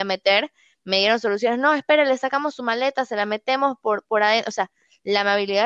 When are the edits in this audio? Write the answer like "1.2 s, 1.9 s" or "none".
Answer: none